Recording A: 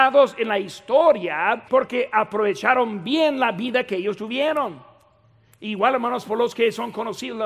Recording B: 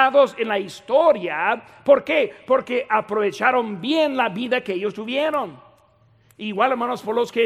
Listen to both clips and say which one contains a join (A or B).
A